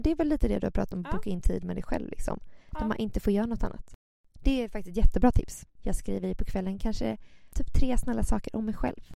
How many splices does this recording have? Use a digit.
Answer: 1